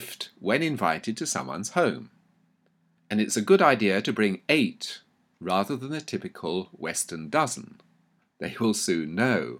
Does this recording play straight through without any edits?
no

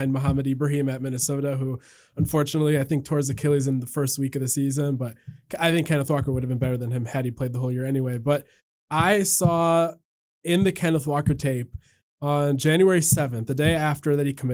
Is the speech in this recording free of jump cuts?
yes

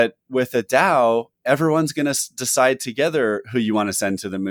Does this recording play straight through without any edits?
yes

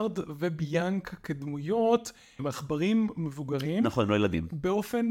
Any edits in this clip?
yes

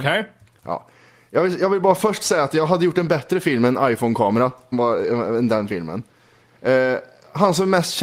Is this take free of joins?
no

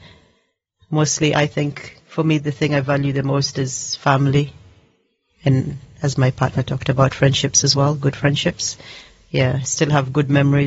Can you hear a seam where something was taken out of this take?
no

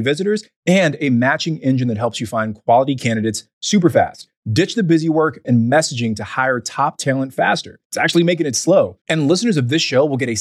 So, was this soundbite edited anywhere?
yes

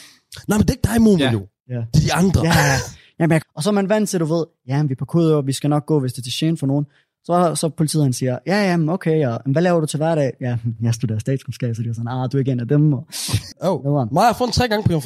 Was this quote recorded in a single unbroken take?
no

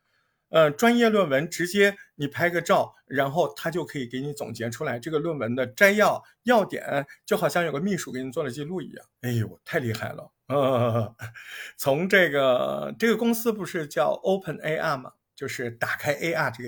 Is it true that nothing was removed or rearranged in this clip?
no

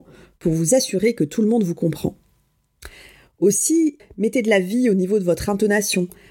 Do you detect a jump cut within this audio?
yes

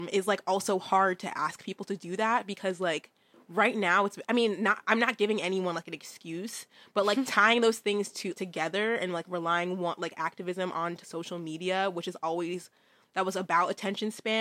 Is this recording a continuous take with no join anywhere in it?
no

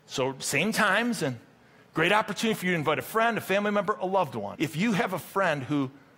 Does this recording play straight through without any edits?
no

